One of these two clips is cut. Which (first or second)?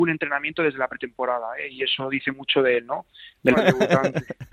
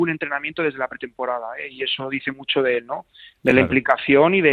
first